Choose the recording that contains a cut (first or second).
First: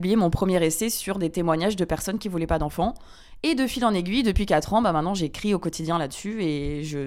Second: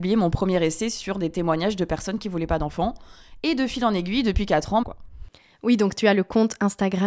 second